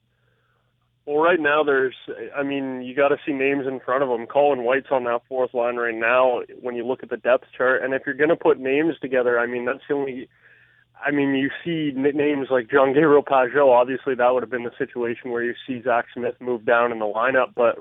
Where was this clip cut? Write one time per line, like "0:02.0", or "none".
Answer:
none